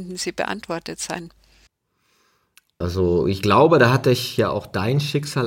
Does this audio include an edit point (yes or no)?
yes